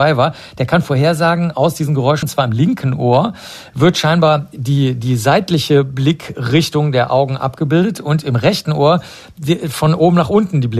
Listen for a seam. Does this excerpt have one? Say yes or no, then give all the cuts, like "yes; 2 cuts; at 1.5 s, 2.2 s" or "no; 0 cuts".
yes; 1 cut; at 2.2 s